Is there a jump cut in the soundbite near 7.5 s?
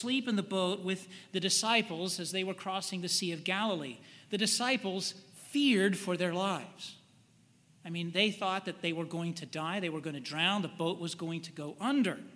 no; 0 cuts

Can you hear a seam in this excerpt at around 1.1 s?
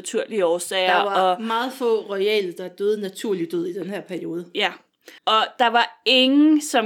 no; 1 cut; at 5.2 s

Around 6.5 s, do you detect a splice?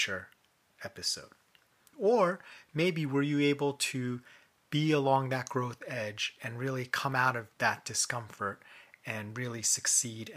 no; 1 cut; at 1.9 s

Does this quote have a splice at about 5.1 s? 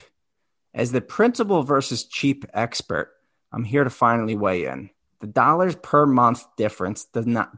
yes; 1 cut; at 5.1 s

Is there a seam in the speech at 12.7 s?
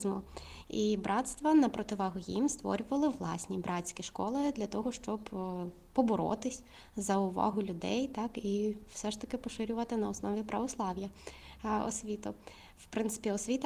no; 0 cuts

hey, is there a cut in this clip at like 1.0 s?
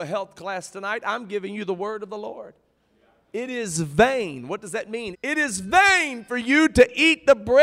no; 1 cut; at 5.1 s

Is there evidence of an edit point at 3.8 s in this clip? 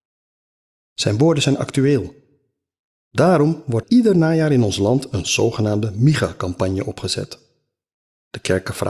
yes; 1 cut; at 3.8 s

